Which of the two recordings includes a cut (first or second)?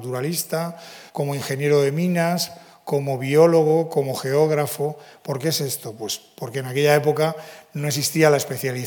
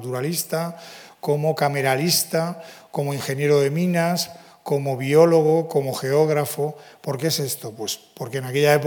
first